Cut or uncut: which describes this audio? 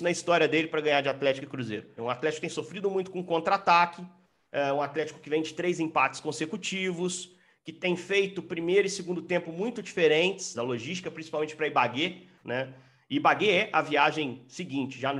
cut